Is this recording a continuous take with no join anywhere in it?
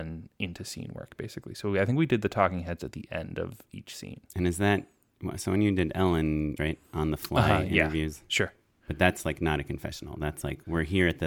no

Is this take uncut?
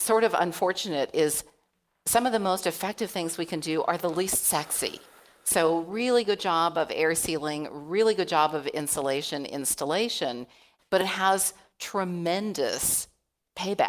no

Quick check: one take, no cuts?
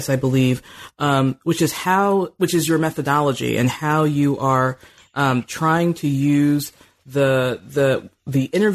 yes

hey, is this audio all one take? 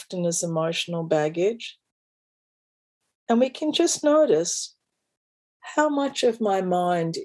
yes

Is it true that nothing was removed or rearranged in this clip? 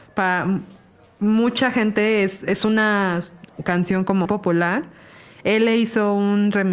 no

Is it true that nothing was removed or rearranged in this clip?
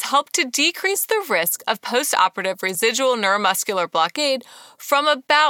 yes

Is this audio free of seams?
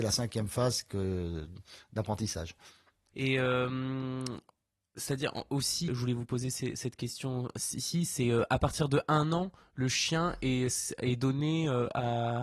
no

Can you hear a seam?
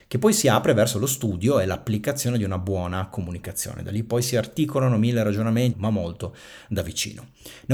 yes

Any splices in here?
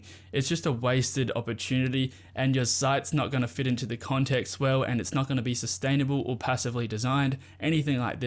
no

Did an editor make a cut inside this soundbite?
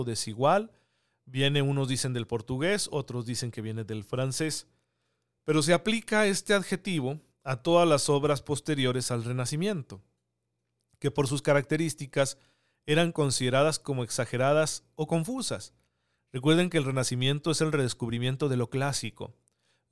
no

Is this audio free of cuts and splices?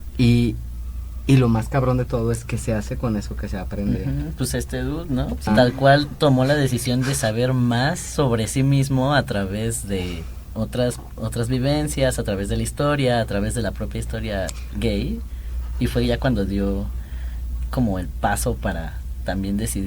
no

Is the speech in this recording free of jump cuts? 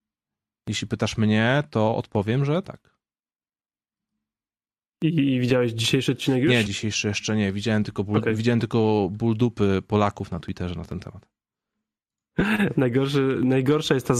no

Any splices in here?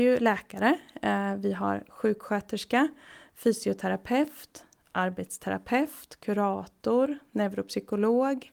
no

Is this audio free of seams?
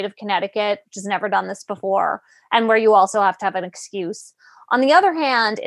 yes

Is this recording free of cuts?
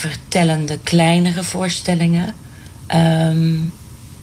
yes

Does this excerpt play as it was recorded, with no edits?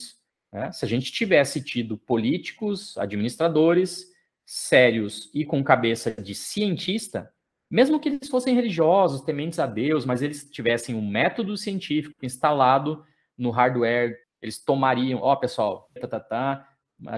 no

